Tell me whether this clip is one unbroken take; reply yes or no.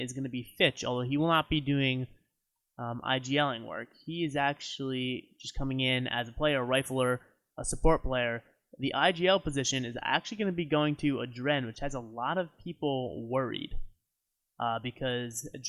yes